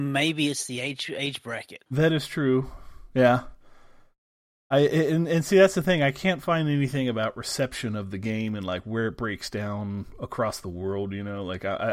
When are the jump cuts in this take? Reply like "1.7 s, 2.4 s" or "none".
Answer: 1.9 s